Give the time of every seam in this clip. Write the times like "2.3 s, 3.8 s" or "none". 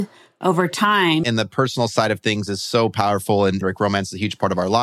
1.2 s, 3.6 s